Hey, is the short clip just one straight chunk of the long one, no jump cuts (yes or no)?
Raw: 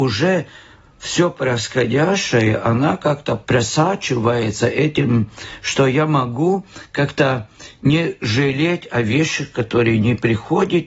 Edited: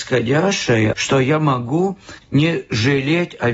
no